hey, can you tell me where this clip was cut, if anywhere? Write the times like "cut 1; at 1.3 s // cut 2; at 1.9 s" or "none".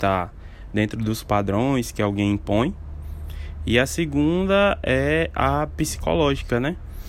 none